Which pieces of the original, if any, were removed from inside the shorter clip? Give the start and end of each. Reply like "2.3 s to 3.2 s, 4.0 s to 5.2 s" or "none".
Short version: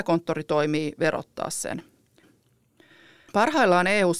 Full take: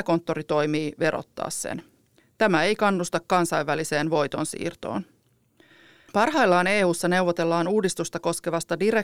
2.2 s to 5.0 s